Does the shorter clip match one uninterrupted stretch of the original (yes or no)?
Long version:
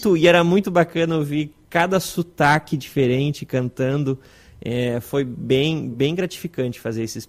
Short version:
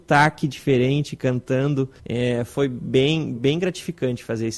no